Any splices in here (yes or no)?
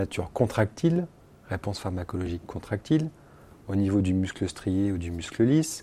no